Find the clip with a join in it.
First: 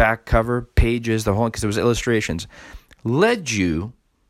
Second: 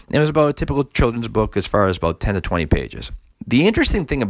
second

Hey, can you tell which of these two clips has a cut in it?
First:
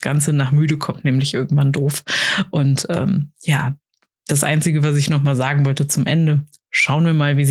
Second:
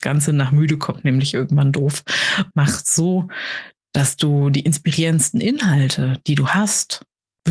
second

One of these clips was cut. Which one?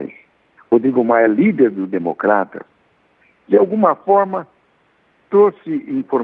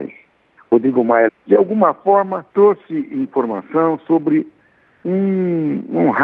second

